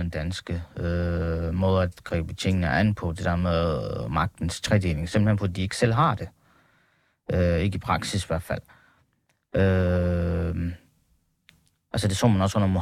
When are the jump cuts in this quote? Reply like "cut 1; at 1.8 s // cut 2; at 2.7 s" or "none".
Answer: none